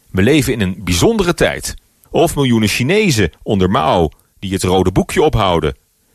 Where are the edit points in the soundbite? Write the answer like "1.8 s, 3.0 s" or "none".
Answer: 2.1 s

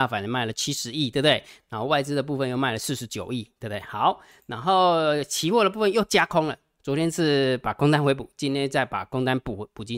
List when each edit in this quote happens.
none

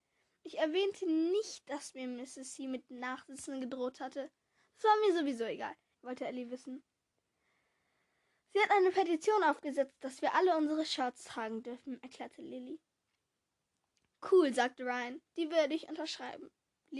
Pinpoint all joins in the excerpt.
5.9 s

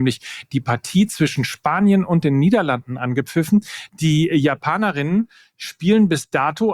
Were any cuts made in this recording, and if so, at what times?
3.9 s

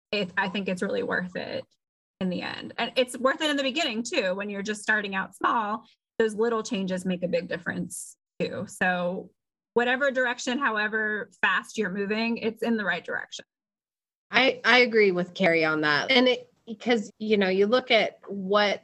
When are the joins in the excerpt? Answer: 16.0 s, 17.1 s

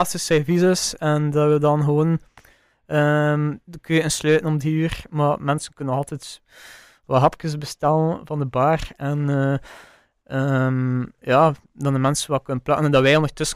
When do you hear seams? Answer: 11.2 s

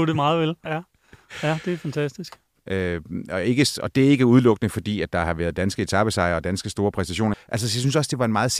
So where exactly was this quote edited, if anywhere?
2.6 s, 7.3 s

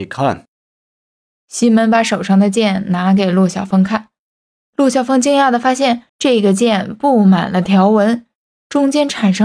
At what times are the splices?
6.1 s

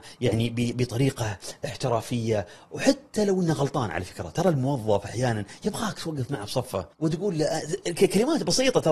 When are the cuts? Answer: 6.9 s

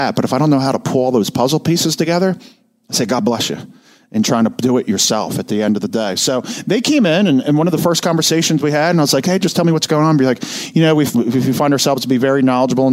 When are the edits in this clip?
11.1 s

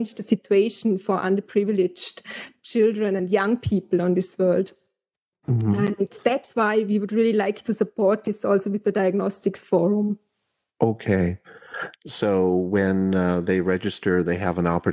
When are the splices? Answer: none

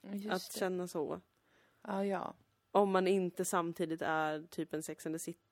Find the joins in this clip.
none

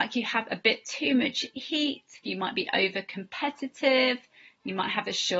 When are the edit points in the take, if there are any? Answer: 2.2 s

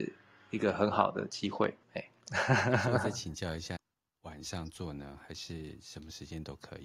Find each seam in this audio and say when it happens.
1.8 s, 3.8 s

